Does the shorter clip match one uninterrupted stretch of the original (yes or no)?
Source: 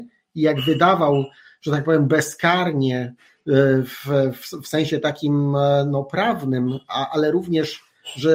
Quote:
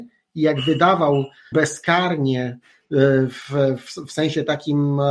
no